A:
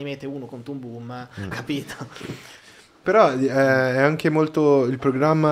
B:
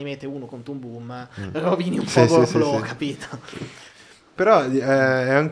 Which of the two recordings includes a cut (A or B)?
A